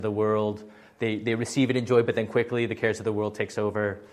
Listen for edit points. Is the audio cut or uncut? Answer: uncut